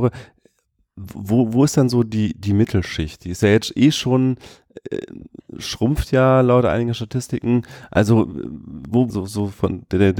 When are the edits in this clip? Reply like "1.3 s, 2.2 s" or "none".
9.1 s